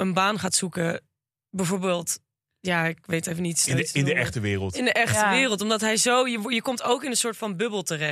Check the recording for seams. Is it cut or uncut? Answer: uncut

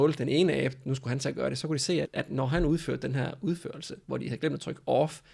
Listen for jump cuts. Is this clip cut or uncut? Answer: cut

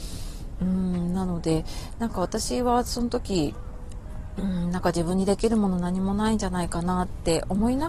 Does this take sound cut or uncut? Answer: uncut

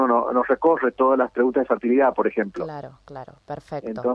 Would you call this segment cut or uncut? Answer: uncut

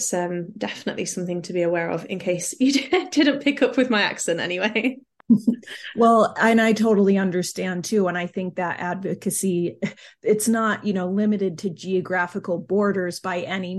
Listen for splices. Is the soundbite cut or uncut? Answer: uncut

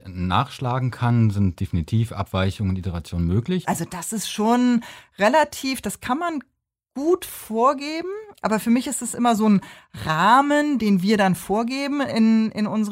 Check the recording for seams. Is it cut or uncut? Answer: cut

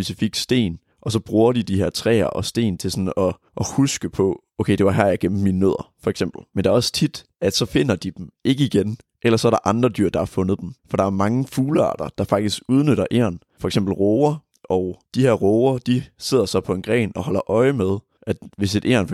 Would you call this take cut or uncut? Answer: cut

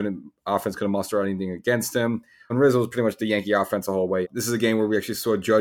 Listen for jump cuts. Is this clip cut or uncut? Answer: cut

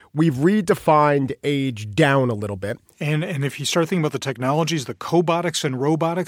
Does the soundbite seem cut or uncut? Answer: cut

